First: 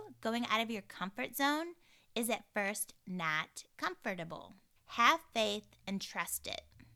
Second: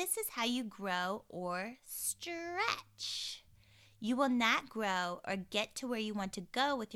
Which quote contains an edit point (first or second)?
first